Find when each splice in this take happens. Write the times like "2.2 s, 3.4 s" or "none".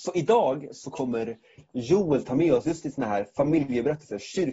none